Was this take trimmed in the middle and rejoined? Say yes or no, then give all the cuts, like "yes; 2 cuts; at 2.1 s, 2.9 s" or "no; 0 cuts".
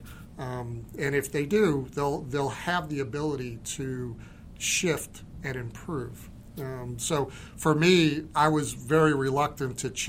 no; 0 cuts